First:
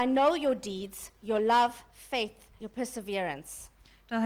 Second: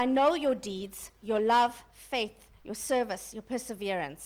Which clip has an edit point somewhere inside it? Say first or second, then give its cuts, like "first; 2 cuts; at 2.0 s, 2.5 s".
first; 1 cut; at 2.6 s